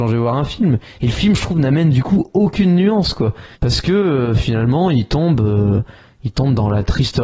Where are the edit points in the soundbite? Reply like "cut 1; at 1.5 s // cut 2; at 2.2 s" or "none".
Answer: cut 1; at 3.5 s